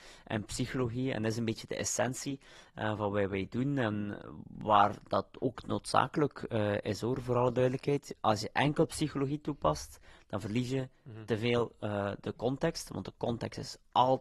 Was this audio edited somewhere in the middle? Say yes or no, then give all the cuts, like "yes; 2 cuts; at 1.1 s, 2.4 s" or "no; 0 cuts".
no; 0 cuts